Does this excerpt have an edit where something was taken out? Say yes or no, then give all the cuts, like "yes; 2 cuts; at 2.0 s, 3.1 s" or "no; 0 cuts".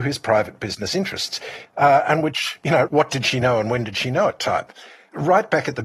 yes; 2 cuts; at 1.6 s, 2.9 s